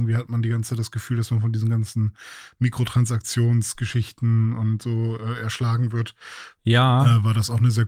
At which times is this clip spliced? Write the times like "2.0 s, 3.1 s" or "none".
6.6 s